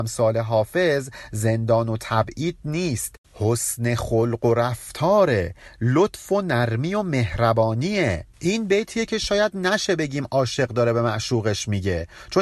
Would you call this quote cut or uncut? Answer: cut